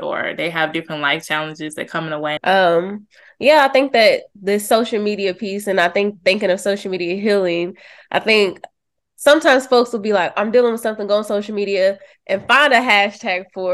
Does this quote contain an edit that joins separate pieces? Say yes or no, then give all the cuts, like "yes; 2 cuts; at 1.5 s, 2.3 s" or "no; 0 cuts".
yes; 1 cut; at 2.4 s